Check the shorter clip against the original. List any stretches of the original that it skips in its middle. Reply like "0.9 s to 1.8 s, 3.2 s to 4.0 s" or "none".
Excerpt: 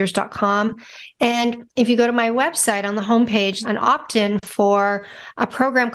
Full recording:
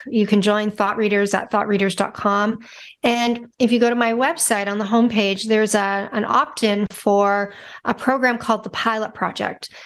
5.5 s to 6.1 s